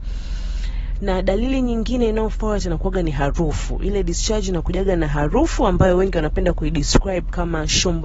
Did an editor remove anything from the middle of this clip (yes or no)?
no